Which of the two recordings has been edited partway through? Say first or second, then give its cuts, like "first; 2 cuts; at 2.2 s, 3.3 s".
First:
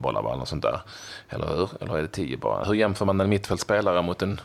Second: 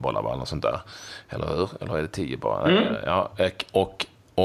first; 1 cut; at 2.6 s